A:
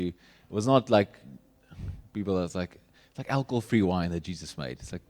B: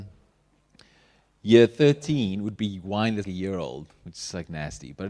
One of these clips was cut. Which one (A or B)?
B